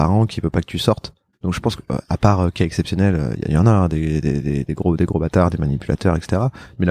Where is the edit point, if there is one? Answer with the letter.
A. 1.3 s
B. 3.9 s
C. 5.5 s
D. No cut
A